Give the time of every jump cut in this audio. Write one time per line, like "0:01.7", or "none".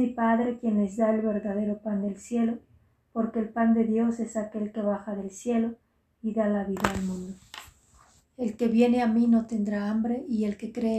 0:08.2